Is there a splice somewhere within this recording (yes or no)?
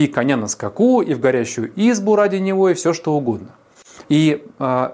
yes